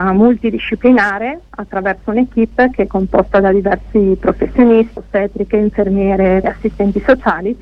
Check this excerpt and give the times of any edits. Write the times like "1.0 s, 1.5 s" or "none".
5.0 s, 6.4 s